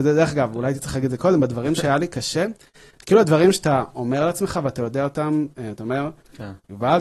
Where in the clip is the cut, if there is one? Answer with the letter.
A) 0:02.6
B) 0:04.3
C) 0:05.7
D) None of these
D